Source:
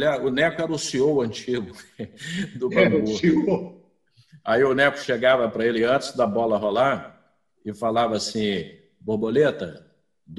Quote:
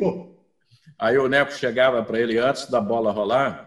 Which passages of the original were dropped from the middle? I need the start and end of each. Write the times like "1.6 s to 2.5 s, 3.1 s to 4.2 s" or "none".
none